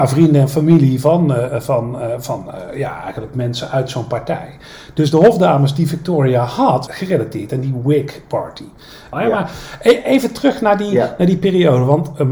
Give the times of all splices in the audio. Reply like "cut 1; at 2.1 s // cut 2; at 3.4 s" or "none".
cut 1; at 6.9 s // cut 2; at 9.1 s